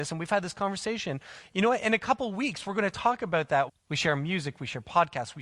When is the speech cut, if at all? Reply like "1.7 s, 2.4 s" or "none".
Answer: 3.7 s